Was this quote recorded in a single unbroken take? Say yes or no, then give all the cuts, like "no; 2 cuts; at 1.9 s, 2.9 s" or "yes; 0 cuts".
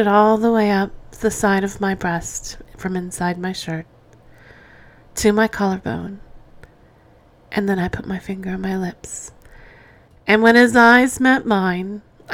yes; 0 cuts